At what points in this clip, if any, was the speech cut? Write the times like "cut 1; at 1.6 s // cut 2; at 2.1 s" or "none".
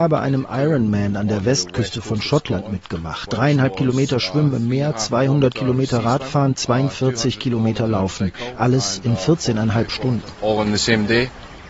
none